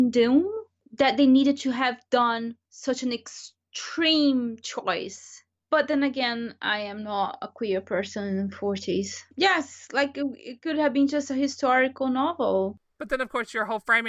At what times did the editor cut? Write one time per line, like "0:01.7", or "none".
0:09.3